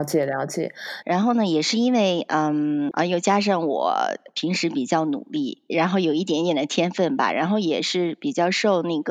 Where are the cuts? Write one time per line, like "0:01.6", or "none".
0:01.0
0:02.9